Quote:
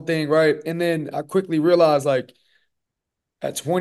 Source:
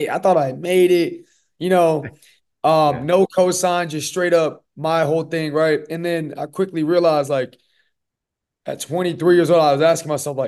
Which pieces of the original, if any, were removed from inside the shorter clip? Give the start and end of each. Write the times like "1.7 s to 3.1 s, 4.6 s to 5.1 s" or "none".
none